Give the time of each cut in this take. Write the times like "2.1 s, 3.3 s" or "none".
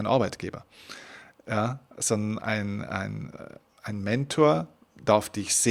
none